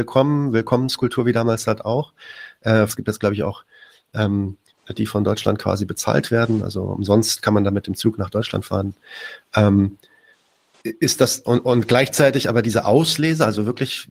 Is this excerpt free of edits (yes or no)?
no